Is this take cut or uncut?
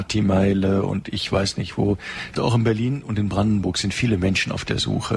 cut